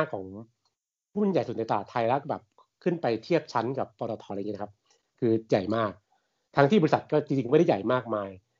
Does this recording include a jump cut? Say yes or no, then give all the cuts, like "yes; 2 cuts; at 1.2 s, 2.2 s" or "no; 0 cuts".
yes; 1 cut; at 4.3 s